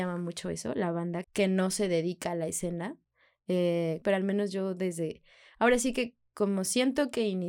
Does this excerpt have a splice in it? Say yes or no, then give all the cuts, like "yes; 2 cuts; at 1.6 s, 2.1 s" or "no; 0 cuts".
yes; 2 cuts; at 1.2 s, 4.0 s